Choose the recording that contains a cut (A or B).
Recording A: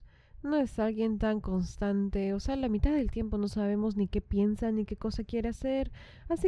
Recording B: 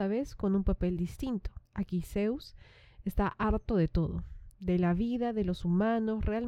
B